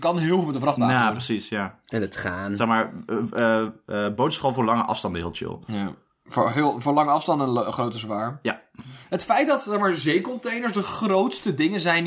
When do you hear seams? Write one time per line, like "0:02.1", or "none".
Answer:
none

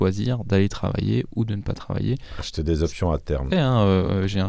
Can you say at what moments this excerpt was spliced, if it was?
0:03.5

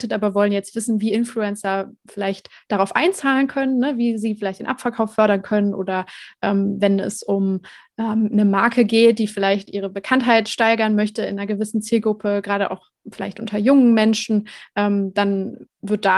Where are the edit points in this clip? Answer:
none

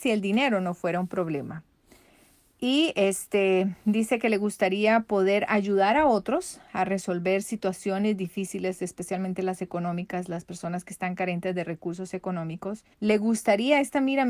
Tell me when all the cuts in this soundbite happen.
0:12.9

